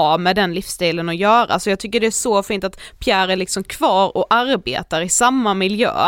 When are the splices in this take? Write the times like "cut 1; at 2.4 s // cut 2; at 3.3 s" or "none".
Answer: none